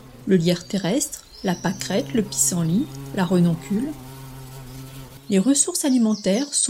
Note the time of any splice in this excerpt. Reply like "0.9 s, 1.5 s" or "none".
5.2 s

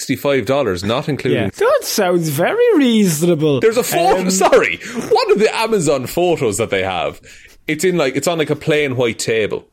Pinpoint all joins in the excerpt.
1.5 s

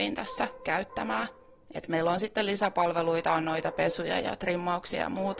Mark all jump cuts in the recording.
none

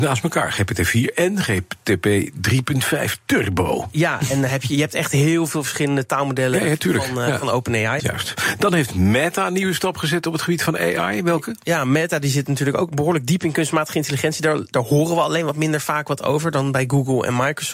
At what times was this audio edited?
8.0 s

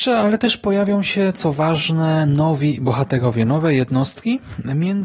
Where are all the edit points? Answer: none

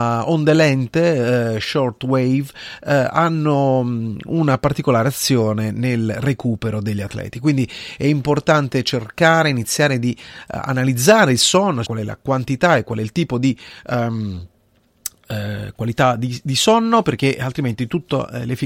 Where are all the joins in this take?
11.8 s

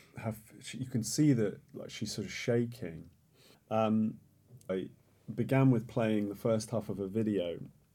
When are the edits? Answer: 3.5 s, 4.7 s

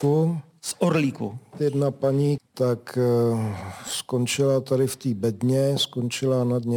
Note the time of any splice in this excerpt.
2.4 s

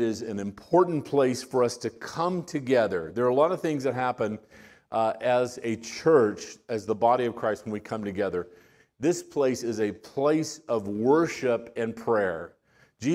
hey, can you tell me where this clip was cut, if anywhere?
none

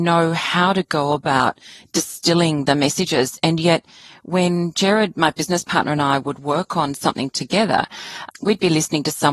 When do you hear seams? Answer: 8.3 s

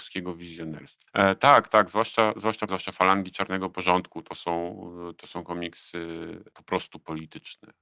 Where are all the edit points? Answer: 1.1 s, 2.7 s

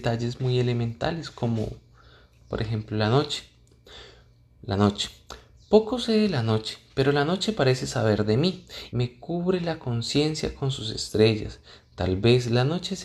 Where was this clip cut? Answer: 8.9 s

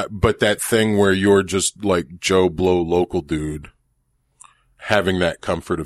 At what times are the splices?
none

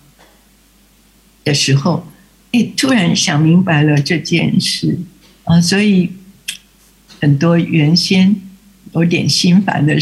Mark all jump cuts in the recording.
none

